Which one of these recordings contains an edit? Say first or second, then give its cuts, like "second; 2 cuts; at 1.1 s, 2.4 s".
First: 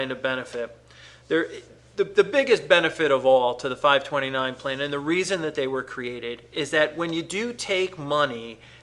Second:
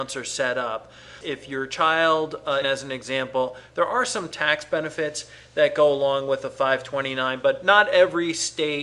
second; 2 cuts; at 1.2 s, 2.6 s